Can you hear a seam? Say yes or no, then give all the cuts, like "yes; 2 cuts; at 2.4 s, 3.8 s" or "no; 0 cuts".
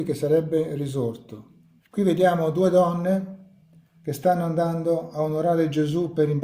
yes; 1 cut; at 1.8 s